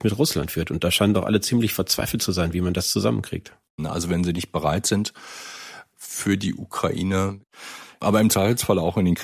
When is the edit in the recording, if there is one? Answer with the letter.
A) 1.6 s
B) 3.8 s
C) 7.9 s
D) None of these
B